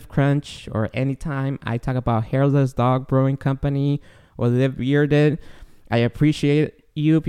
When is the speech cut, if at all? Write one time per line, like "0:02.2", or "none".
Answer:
none